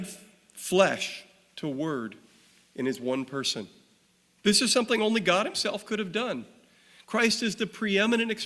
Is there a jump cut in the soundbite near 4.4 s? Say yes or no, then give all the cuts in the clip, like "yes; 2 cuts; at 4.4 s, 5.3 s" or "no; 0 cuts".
yes; 1 cut; at 4.4 s